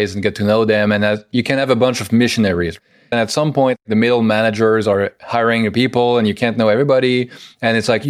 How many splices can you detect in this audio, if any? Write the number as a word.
one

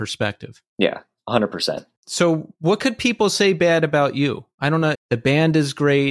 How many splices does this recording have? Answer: one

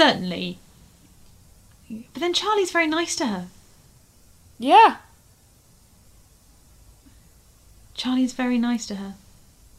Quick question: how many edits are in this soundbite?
zero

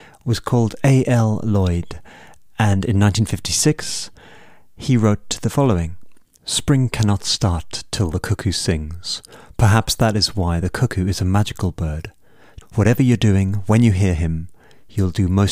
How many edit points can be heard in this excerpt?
one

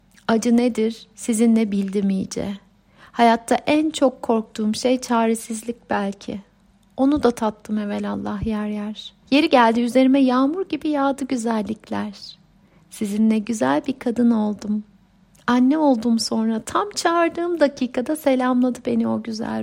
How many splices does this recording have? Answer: one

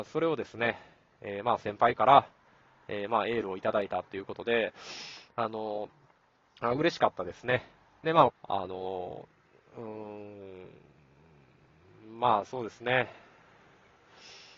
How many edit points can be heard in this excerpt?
one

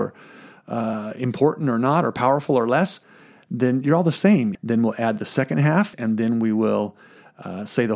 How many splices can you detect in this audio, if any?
two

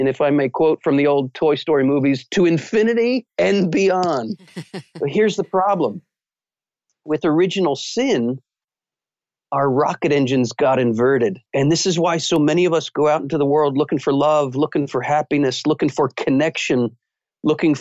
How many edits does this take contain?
one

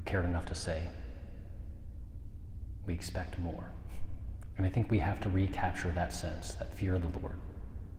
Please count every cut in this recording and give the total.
one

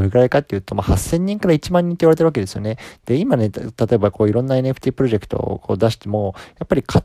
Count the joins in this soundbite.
one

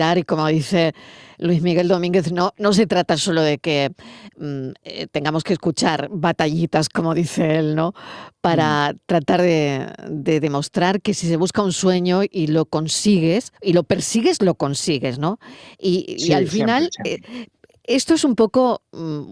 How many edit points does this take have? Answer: one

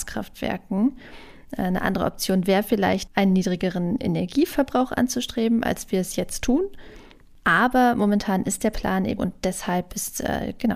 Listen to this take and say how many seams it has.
one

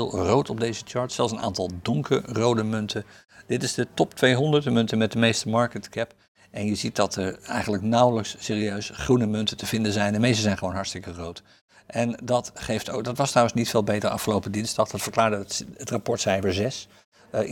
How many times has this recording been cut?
zero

